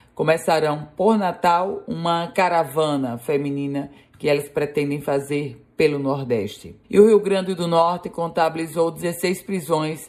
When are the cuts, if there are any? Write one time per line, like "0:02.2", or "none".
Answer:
0:06.8